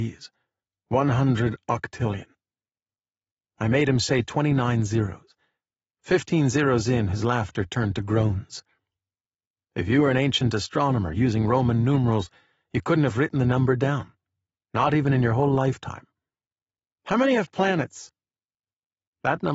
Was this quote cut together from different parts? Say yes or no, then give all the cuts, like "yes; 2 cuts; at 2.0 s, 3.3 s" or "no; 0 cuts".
no; 0 cuts